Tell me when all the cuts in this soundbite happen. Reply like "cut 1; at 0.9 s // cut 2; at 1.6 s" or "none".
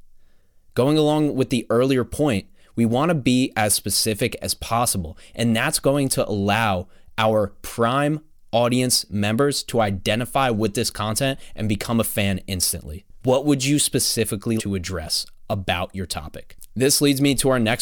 cut 1; at 13.2 s // cut 2; at 14.6 s